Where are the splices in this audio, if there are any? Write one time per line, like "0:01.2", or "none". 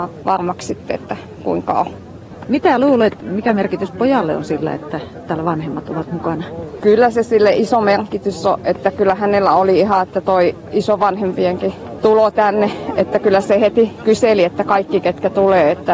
none